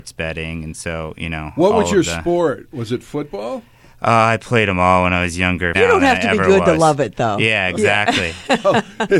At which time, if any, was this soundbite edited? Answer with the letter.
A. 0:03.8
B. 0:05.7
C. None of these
B